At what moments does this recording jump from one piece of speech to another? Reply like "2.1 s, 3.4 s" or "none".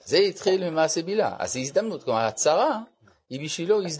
none